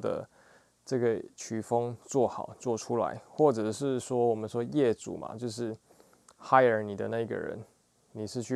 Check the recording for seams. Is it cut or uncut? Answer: uncut